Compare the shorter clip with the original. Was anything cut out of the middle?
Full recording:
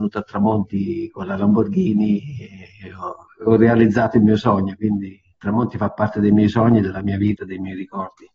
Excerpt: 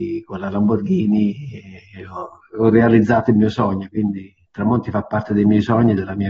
no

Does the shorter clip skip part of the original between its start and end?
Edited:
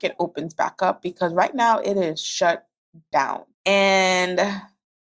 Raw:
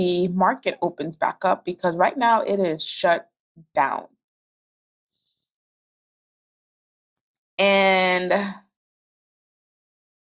yes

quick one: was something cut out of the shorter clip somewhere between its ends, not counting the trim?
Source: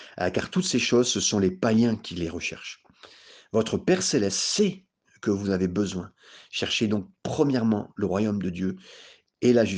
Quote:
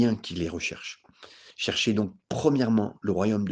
yes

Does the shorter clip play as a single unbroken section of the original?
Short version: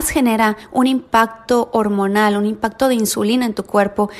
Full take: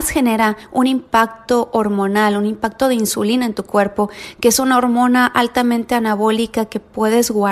yes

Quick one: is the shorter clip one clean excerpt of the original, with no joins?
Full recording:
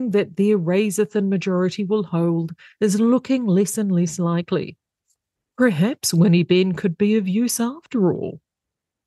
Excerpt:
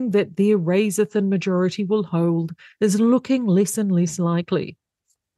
yes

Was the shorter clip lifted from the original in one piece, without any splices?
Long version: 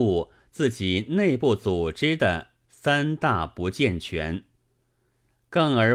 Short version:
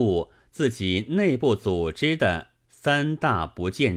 yes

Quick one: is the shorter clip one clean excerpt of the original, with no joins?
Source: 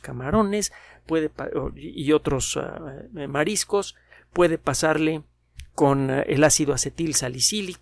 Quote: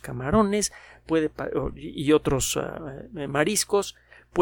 yes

